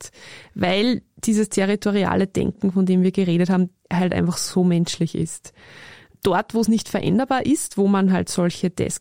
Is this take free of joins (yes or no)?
yes